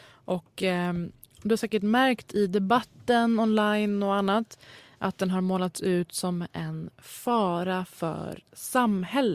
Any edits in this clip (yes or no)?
no